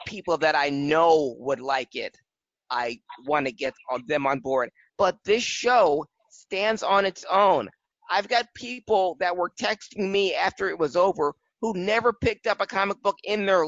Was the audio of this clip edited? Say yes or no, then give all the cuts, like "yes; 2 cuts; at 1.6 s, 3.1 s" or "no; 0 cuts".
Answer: yes; 1 cut; at 4.9 s